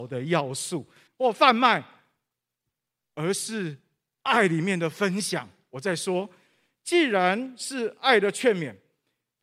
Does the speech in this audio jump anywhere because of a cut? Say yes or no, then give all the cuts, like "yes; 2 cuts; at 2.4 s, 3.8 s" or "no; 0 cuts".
yes; 1 cut; at 1.1 s